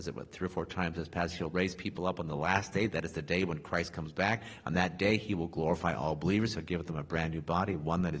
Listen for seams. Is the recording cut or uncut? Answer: uncut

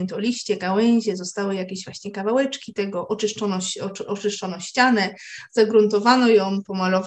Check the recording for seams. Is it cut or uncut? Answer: uncut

